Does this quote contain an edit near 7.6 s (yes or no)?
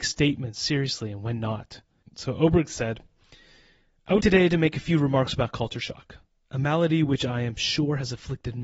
no